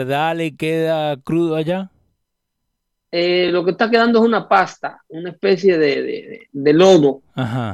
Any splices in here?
no; 0 cuts

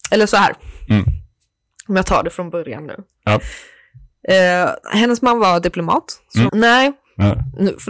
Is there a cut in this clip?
yes; 2 cuts; at 4.8 s, 6.5 s

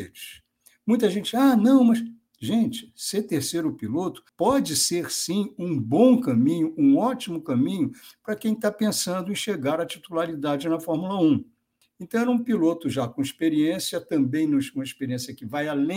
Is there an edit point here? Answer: yes; 2 cuts; at 4.3 s, 11.8 s

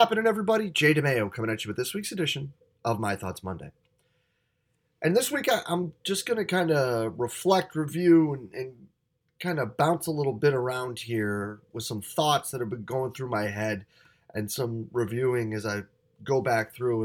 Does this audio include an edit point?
no; 0 cuts

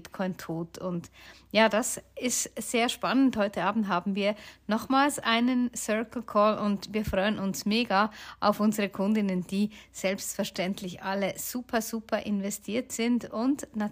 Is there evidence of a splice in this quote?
no; 0 cuts

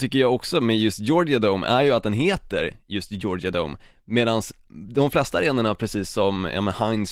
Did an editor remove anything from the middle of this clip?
no; 0 cuts

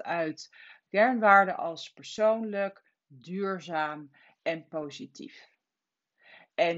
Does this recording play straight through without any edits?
yes; 0 cuts

